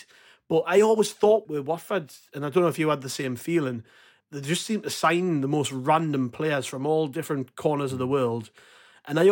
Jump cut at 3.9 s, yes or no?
no